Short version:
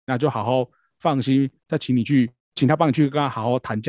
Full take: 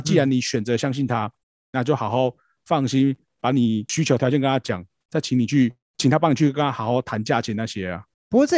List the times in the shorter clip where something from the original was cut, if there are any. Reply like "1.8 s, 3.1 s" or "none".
1.6 s